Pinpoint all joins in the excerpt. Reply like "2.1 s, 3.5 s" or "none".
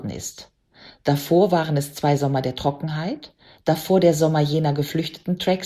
none